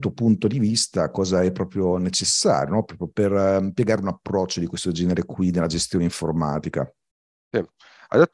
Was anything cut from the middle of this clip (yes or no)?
no